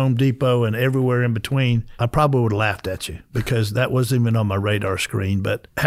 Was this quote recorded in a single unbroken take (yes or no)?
yes